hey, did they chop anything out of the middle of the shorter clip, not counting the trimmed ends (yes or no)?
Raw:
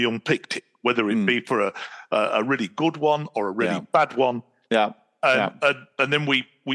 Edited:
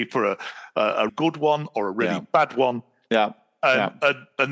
yes